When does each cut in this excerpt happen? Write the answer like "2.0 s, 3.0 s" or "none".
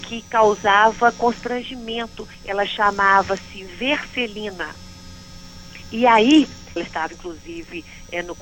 6.8 s